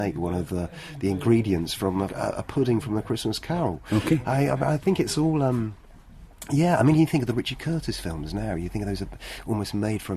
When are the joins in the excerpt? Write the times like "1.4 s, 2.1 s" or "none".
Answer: 2.1 s